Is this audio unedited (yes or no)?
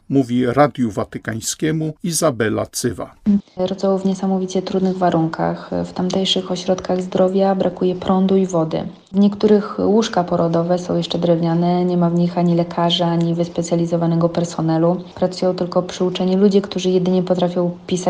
no